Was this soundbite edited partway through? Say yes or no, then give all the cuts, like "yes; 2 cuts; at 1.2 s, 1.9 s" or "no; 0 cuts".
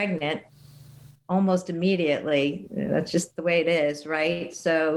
no; 0 cuts